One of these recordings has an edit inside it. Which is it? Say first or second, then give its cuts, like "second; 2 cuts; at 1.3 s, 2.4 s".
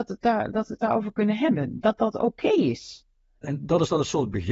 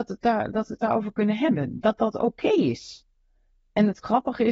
first; 1 cut; at 3.4 s